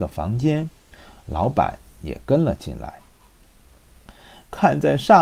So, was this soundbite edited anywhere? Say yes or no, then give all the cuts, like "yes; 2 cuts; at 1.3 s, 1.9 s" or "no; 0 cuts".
no; 0 cuts